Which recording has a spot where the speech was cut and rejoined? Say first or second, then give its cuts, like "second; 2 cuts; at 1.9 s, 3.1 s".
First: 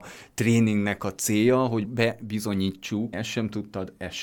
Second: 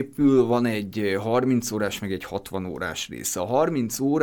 first; 2 cuts; at 1.8 s, 3.1 s